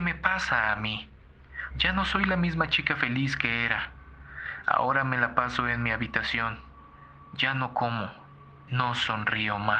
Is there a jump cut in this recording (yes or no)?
yes